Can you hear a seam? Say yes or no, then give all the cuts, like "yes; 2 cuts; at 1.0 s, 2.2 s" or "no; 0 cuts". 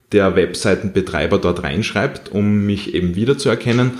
no; 0 cuts